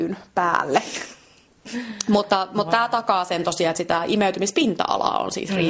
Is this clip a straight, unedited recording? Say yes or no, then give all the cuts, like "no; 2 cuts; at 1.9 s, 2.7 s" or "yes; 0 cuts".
yes; 0 cuts